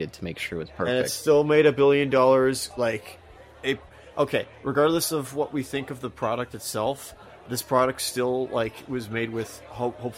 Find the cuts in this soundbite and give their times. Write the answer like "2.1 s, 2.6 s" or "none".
2.7 s, 7.5 s

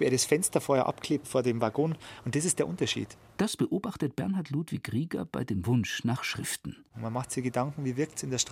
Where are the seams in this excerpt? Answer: 3.4 s, 6.9 s

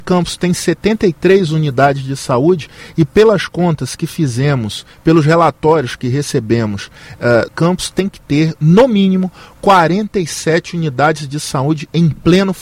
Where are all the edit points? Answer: 7.5 s

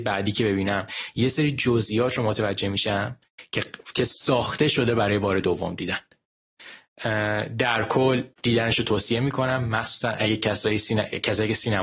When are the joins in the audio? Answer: 3.9 s, 8.3 s

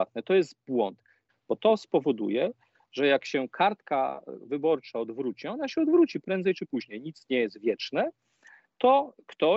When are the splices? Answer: 1.3 s

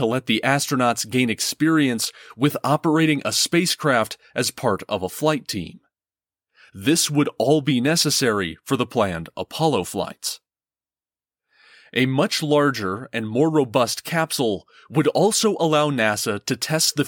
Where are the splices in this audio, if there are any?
none

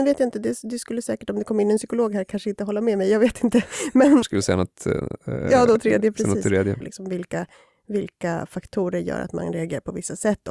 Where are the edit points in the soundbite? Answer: 4.2 s, 6.8 s

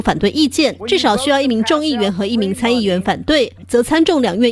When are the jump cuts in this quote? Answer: none

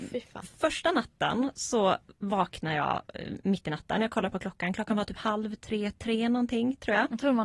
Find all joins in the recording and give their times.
none

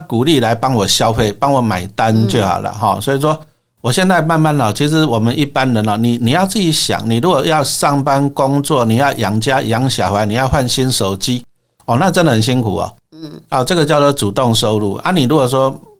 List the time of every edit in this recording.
none

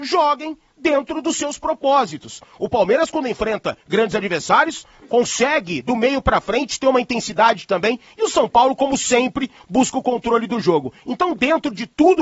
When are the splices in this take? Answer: 5.0 s

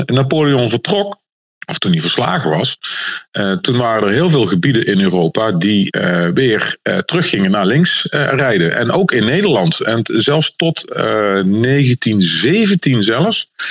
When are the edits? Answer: none

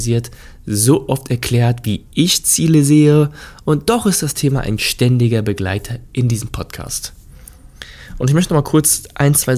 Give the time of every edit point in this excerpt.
none

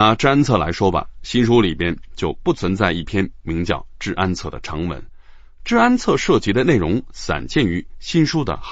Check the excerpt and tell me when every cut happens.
none

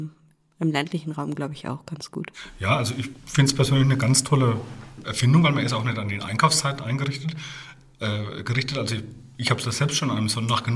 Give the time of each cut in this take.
none

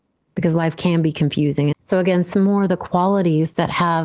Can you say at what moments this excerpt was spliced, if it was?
1.7 s

